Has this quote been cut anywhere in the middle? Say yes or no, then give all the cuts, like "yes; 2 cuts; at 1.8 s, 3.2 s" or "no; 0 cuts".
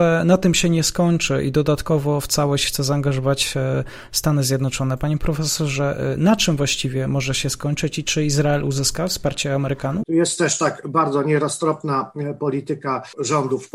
yes; 1 cut; at 10.0 s